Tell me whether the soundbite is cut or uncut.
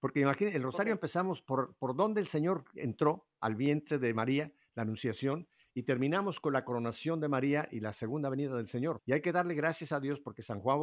cut